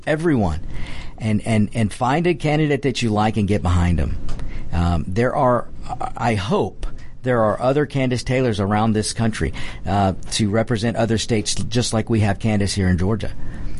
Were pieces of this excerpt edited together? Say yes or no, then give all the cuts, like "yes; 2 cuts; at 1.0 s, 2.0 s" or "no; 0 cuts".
no; 0 cuts